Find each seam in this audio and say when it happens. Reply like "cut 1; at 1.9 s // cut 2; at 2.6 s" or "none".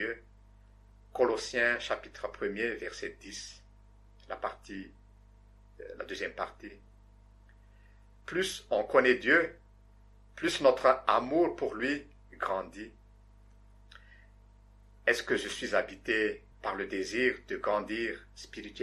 cut 1; at 16.5 s